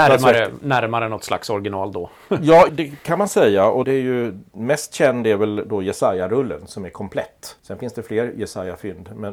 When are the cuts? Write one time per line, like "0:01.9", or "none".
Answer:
0:02.7
0:03.8
0:07.6